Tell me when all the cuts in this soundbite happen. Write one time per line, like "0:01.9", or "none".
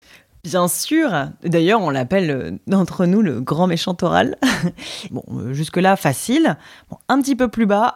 0:05.1